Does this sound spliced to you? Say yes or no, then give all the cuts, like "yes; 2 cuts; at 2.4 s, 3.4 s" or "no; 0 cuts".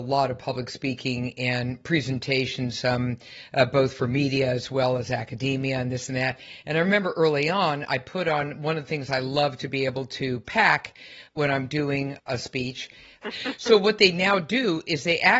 yes; 1 cut; at 13.2 s